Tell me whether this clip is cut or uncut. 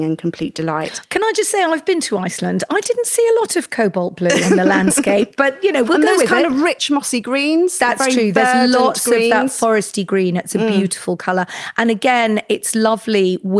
cut